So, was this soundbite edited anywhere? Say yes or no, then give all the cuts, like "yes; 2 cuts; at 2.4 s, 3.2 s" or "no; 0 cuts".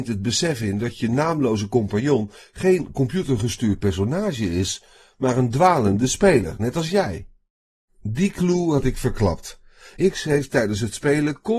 no; 0 cuts